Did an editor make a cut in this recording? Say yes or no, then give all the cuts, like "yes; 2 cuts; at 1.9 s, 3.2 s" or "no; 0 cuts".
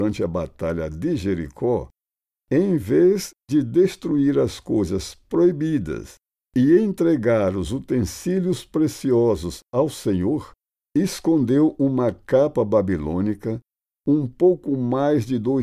no; 0 cuts